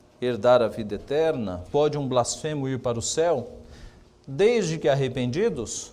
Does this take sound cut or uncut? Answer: uncut